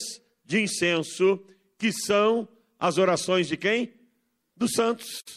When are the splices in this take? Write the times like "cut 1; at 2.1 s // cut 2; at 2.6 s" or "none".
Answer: none